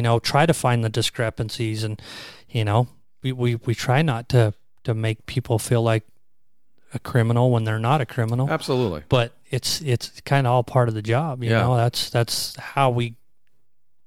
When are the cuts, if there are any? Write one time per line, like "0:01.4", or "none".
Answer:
none